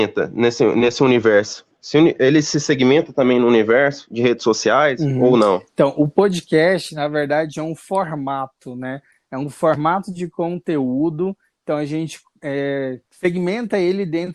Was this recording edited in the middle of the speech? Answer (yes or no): yes